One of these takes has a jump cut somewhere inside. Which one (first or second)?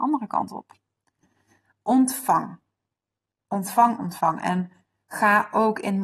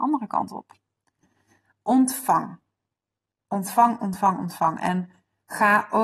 first